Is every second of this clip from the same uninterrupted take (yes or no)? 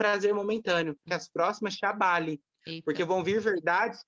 no